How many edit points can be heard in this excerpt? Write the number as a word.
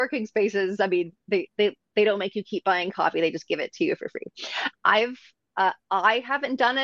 one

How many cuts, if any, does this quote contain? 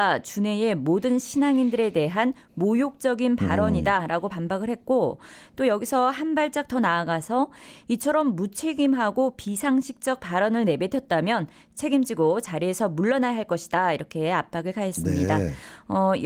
zero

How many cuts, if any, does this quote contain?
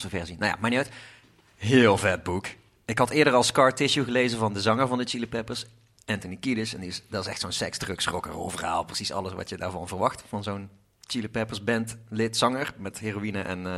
zero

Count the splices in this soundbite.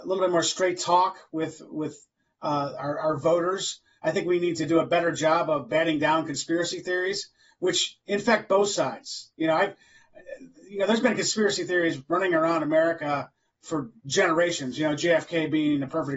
zero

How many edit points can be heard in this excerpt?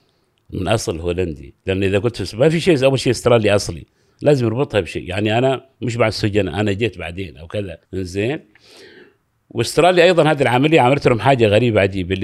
one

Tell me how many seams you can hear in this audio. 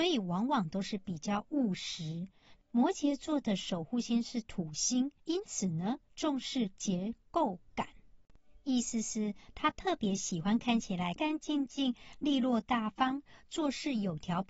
three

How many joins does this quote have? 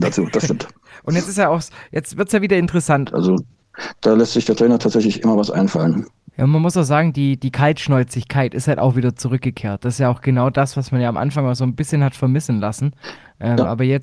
one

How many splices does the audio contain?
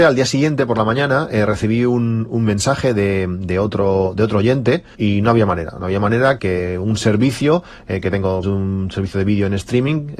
three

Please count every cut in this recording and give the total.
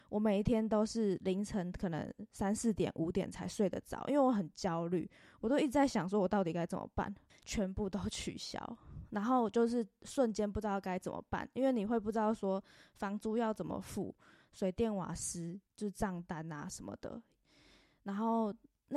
two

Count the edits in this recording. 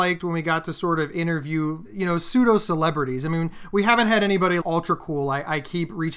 two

